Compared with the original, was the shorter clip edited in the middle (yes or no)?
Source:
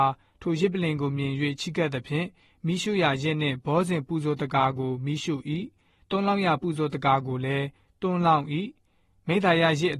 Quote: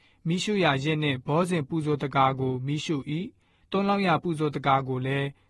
no